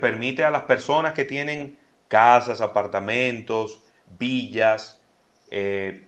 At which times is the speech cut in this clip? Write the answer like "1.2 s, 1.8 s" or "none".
none